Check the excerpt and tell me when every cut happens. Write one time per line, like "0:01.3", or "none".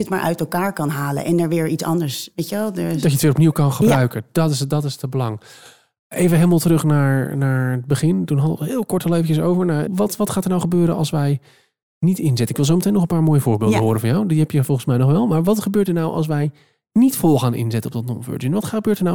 0:09.9